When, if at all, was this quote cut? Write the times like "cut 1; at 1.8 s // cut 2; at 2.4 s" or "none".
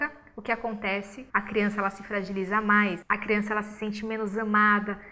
cut 1; at 1.3 s